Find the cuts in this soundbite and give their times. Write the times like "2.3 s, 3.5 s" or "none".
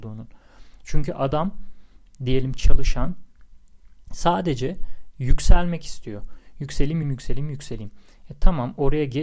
7.0 s